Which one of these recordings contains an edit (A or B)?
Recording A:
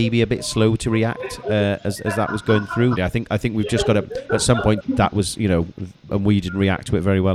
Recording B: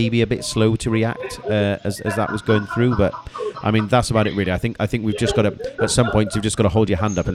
A